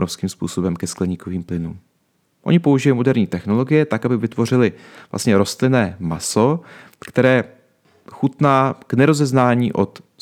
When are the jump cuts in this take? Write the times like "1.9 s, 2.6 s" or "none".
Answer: 2.3 s